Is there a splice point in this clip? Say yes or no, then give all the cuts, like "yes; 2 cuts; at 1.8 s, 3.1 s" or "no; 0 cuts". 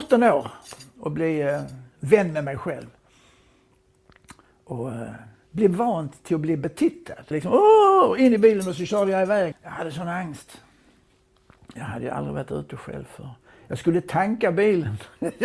yes; 2 cuts; at 7.3 s, 9.5 s